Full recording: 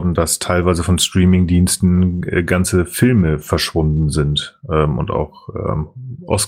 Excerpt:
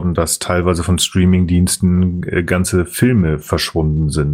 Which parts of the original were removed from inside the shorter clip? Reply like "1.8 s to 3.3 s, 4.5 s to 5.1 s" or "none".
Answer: none